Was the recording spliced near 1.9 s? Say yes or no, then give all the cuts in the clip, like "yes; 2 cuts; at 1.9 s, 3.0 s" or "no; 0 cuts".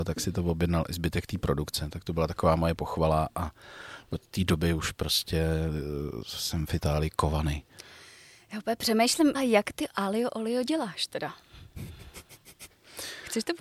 no; 1 cut; at 9.3 s